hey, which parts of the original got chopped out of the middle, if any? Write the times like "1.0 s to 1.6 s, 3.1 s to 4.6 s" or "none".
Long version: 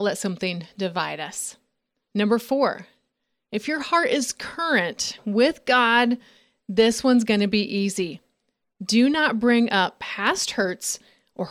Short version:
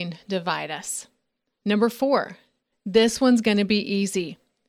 3.2 s to 6.5 s